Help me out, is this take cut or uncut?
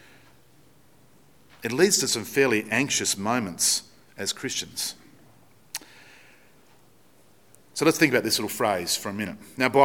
uncut